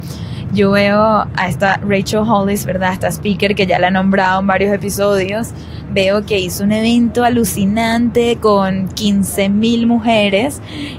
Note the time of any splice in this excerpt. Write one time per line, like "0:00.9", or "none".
none